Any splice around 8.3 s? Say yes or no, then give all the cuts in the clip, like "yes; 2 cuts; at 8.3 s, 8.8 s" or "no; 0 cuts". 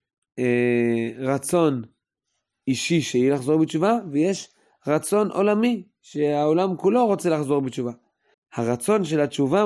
yes; 1 cut; at 8.3 s